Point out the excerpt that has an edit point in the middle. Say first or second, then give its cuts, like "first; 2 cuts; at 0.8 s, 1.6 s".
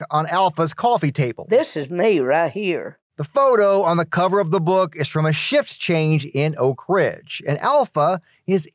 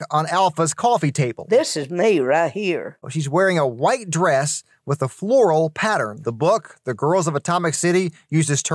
second; 2 cuts; at 3.0 s, 6.2 s